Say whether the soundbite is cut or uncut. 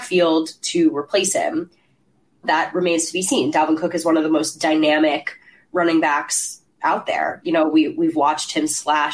cut